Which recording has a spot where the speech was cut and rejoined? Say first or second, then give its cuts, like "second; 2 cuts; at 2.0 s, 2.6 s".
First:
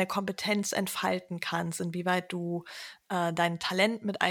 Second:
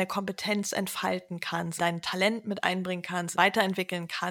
second; 2 cuts; at 1.8 s, 3.3 s